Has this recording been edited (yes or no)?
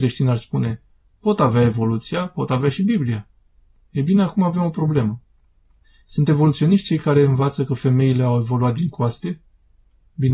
no